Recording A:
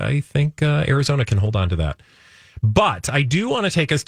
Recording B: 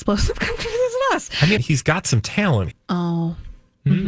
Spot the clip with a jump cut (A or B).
B